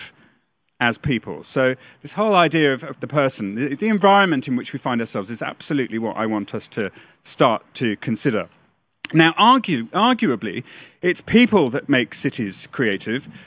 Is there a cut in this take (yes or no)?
yes